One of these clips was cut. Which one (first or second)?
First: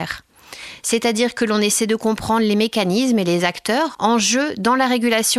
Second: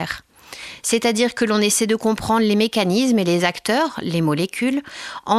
first